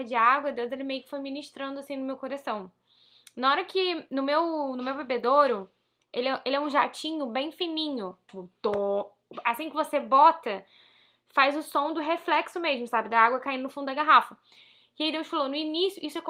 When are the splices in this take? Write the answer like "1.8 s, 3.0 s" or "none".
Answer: 8.3 s